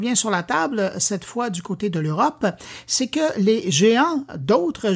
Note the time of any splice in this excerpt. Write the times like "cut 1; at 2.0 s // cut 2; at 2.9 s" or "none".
none